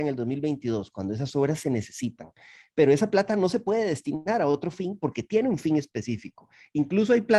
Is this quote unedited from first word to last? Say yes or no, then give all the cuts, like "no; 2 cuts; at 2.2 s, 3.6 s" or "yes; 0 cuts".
yes; 0 cuts